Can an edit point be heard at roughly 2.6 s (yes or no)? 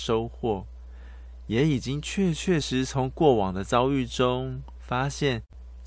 yes